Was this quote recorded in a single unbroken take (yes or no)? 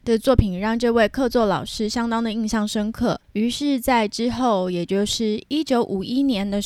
no